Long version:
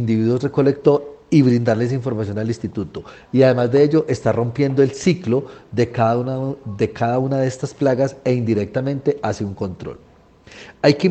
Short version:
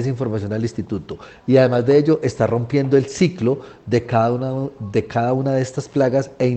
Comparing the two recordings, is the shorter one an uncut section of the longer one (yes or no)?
yes